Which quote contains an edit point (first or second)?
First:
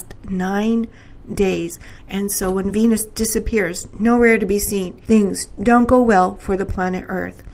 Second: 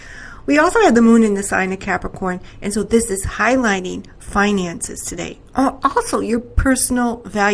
first